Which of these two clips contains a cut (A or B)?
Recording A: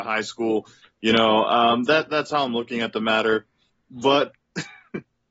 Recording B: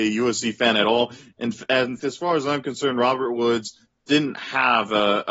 B